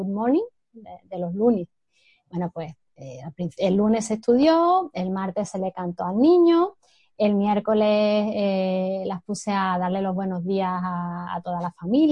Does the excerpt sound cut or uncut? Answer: uncut